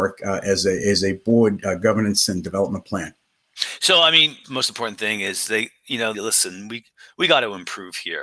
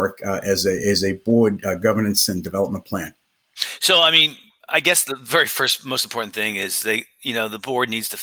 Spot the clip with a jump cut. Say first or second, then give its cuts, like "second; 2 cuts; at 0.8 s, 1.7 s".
first; 2 cuts; at 4.4 s, 6.1 s